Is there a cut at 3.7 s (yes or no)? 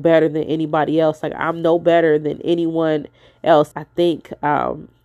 yes